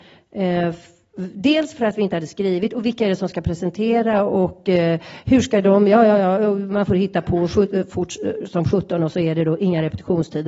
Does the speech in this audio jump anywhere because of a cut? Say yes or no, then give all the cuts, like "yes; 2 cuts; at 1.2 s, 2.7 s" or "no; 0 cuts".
no; 0 cuts